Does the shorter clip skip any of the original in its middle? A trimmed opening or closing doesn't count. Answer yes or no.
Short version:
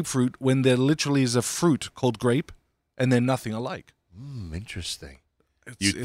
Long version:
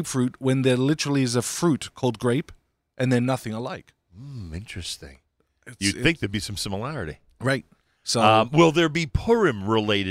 no